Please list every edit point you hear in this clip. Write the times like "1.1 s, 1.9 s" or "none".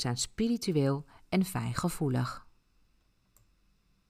none